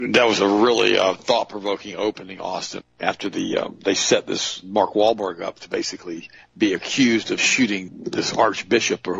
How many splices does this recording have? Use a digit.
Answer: 2